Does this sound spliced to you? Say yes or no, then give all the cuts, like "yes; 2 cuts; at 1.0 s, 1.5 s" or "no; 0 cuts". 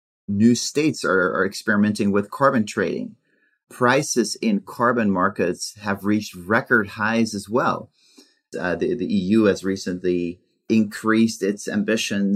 yes; 1 cut; at 8.5 s